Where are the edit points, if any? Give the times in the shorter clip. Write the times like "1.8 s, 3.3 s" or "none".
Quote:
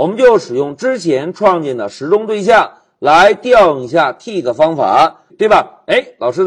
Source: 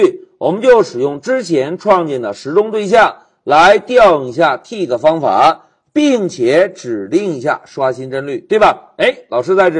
5.3 s